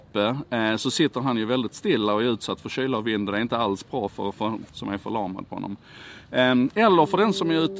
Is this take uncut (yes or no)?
no